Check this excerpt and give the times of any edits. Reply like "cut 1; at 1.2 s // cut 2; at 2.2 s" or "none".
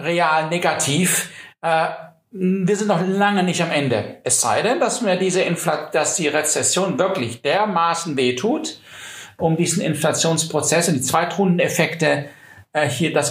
none